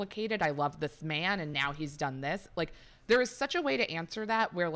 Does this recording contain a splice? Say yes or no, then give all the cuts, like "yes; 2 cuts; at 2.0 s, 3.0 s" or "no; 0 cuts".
no; 0 cuts